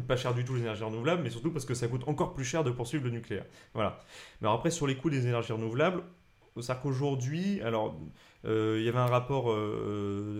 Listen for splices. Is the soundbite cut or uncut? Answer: uncut